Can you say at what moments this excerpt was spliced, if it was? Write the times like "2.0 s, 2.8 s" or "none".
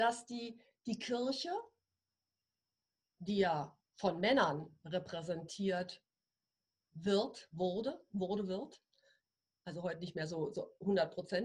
none